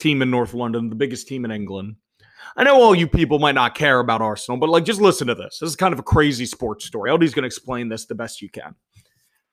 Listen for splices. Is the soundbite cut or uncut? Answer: uncut